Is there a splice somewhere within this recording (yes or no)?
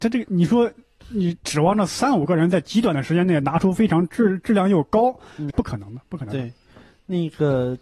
yes